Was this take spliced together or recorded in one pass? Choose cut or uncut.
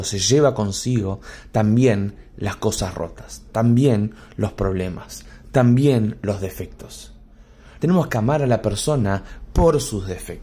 cut